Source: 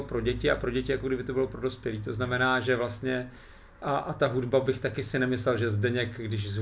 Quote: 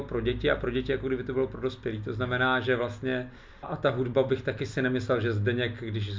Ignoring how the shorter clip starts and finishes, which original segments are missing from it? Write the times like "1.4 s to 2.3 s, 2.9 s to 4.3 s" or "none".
3.6 s to 4.0 s